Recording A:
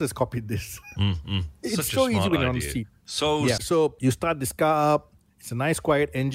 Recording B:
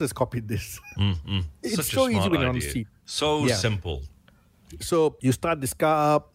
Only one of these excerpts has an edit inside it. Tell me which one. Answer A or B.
A